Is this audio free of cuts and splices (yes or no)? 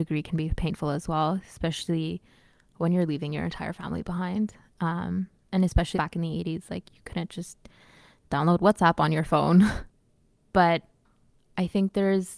no